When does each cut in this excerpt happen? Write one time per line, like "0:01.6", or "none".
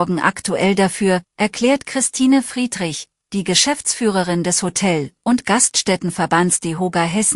0:01.3